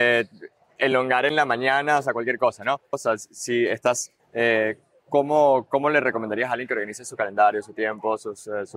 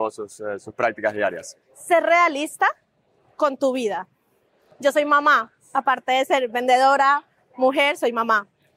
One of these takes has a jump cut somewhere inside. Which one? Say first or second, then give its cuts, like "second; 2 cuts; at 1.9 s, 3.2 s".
first; 2 cuts; at 2.9 s, 4.2 s